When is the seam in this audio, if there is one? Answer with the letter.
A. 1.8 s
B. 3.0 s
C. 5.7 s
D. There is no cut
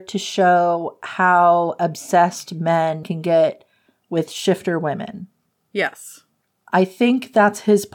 B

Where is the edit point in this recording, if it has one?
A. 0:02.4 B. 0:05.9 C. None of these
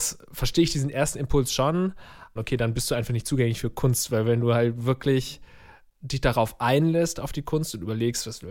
A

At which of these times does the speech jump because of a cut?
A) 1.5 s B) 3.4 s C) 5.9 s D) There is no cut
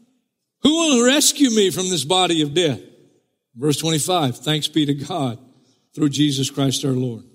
D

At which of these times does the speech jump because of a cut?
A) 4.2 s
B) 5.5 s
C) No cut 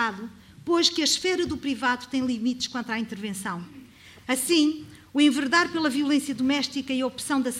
A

